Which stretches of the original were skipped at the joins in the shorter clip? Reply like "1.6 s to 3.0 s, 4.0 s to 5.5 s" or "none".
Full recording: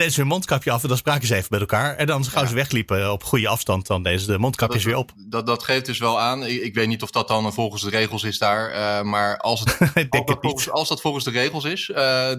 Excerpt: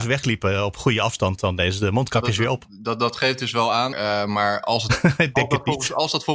6.4 s to 8.7 s